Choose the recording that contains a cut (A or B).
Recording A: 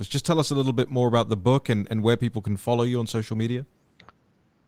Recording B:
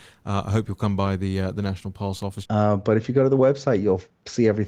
B